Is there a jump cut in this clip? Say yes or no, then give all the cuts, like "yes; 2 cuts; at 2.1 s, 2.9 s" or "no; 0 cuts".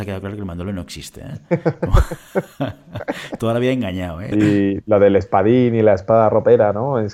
yes; 1 cut; at 4.3 s